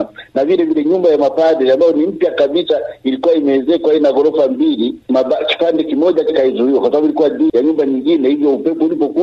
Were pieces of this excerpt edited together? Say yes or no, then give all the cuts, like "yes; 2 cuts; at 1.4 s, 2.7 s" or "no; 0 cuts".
yes; 1 cut; at 7.5 s